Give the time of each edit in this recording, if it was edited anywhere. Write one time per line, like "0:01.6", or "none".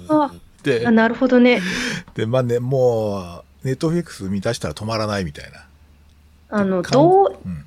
none